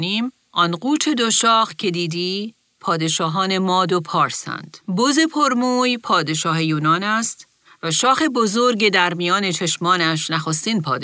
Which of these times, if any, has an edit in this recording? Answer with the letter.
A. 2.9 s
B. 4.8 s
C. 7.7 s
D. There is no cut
B